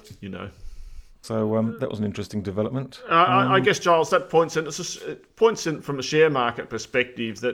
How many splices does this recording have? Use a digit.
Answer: 1